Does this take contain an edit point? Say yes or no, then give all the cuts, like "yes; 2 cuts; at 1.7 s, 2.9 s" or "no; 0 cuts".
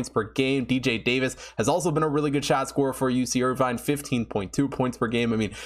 no; 0 cuts